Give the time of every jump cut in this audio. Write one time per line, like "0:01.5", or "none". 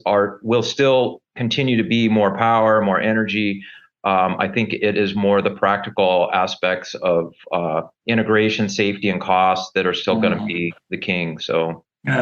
0:07.9